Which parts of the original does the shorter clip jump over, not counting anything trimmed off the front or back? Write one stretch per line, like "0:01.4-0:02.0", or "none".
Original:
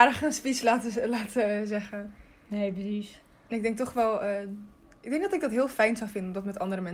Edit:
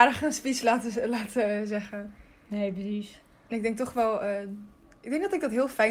none